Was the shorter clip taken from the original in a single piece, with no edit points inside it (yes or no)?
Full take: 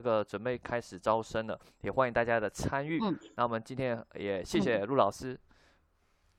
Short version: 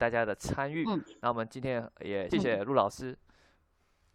no